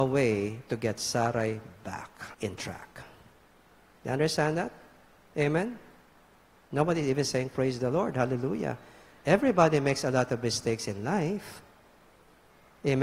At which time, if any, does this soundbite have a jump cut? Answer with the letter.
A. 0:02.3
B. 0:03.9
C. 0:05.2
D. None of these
A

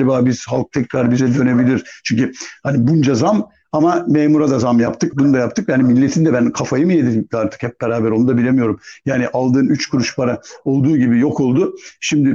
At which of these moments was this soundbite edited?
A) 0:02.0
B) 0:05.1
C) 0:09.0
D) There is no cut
B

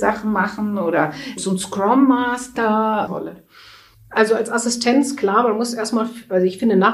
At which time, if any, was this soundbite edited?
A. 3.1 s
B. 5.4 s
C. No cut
A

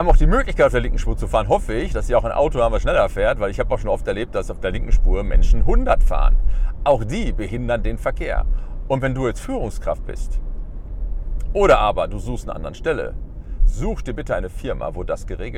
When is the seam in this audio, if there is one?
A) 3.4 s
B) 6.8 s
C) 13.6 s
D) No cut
C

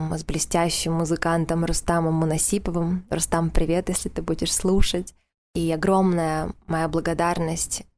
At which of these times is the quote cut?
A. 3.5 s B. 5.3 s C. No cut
C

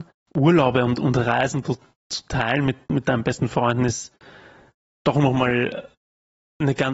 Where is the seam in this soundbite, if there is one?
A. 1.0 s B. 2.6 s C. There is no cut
C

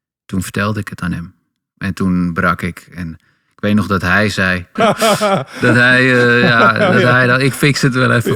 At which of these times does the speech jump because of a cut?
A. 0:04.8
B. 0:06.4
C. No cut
A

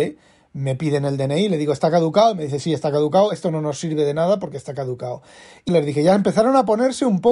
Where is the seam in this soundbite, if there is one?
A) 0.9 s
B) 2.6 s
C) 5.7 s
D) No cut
C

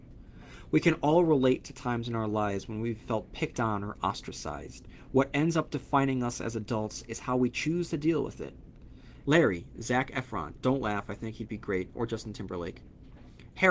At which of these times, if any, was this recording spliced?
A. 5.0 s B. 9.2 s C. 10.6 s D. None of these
B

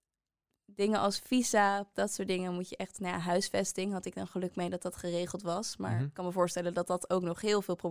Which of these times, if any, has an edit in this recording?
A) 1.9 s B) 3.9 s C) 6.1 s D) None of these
A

